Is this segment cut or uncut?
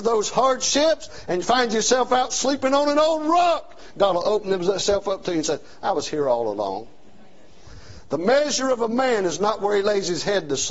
uncut